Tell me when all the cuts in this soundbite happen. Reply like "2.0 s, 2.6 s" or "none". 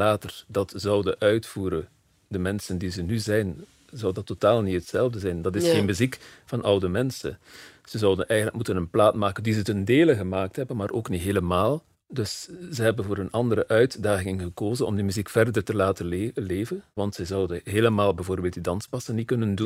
11.9 s, 17.0 s